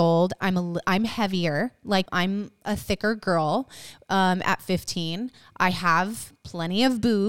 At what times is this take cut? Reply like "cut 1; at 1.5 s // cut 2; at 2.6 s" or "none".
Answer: cut 1; at 2.1 s